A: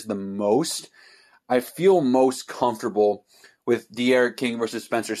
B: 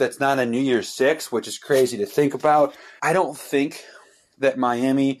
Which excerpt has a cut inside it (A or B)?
B